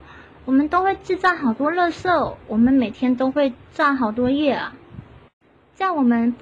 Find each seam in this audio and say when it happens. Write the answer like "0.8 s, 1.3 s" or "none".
none